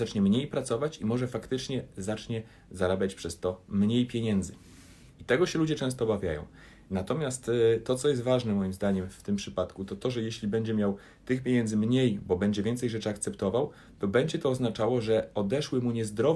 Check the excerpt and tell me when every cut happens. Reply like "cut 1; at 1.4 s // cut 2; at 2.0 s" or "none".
none